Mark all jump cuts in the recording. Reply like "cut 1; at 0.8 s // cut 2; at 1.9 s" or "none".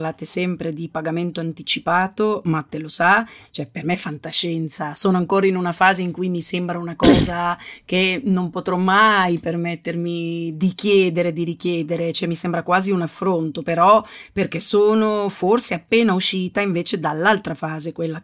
none